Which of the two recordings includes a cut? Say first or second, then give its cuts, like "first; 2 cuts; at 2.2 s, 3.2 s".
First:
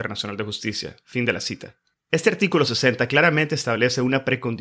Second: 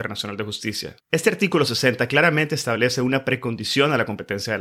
second; 1 cut; at 1.0 s